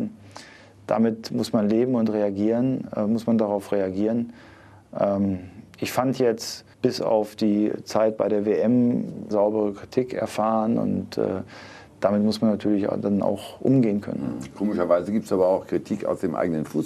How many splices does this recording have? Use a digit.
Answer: 2